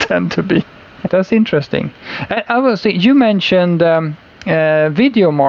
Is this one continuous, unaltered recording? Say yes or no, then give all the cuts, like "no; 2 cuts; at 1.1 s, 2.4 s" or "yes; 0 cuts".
no; 1 cut; at 1.1 s